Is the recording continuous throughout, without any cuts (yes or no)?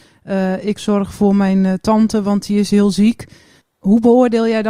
no